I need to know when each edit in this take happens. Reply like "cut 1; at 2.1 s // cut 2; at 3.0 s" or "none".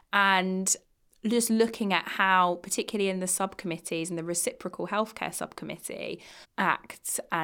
cut 1; at 6.4 s